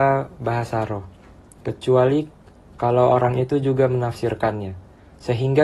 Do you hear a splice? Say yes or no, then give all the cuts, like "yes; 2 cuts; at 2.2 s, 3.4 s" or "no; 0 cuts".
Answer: no; 0 cuts